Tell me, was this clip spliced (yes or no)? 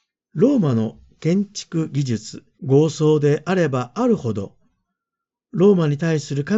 yes